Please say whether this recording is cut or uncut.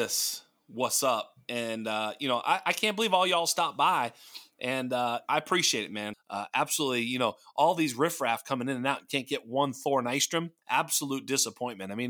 cut